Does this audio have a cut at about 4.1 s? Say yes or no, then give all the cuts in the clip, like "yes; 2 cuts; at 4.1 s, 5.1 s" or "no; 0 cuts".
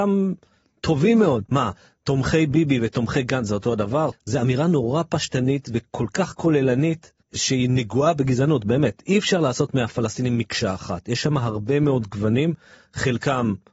yes; 2 cuts; at 1.5 s, 4.1 s